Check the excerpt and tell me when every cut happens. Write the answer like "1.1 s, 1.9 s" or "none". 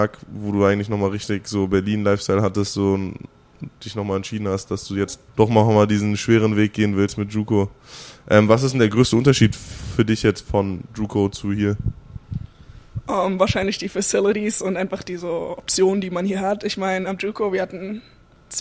5.3 s

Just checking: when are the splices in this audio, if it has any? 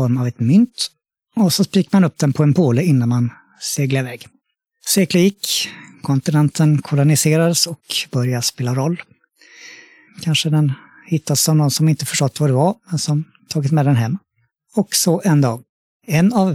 10.1 s

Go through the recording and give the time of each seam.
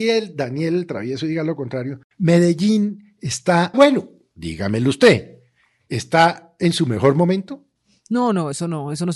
3.7 s

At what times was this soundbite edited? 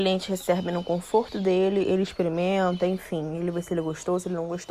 none

